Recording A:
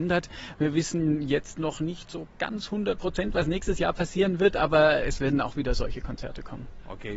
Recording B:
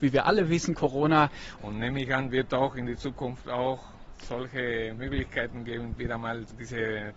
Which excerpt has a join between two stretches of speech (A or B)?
B